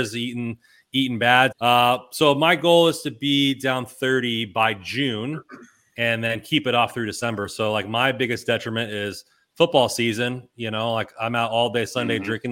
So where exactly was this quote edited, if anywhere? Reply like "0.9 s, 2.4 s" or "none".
1.5 s